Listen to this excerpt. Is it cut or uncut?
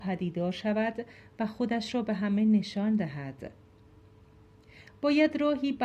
uncut